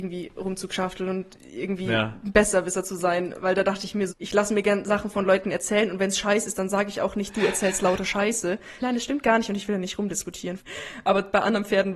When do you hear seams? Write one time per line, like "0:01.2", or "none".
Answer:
0:04.1
0:08.8
0:10.6

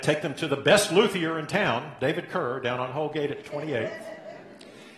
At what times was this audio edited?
none

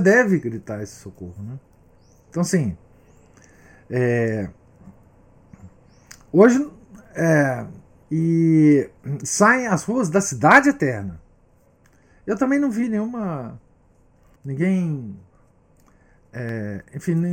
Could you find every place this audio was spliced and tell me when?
0:08.0
0:14.4

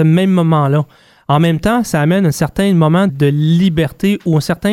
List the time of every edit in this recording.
0:03.1

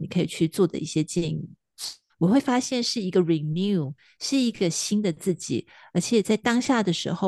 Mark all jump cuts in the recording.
0:02.1

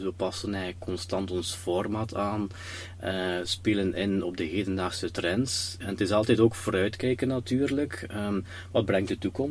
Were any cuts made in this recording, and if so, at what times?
none

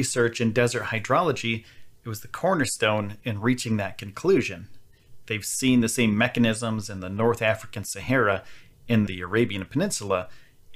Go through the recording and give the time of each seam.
0:09.1

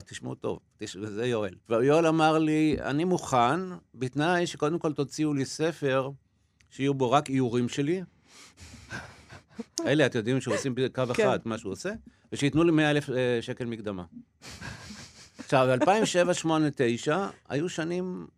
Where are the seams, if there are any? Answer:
0:01.6

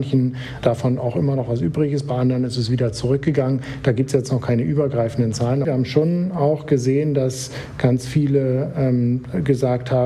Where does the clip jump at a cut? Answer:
0:05.6

